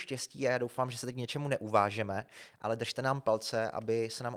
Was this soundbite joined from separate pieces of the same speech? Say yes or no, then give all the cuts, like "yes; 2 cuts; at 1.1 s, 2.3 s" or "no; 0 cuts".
no; 0 cuts